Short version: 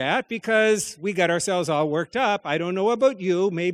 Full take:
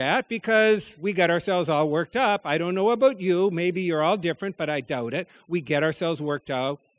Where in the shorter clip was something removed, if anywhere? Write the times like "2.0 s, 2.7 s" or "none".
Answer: none